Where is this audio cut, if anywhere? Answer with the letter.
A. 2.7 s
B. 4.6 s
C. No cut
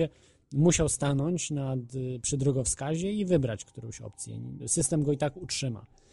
B